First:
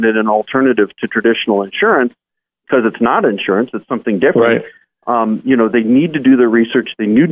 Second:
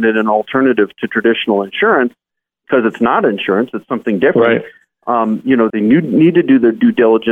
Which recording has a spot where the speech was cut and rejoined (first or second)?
second